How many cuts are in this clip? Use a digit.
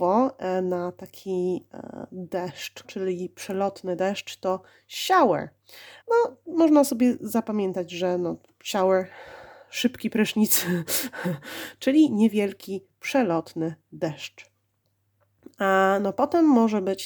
2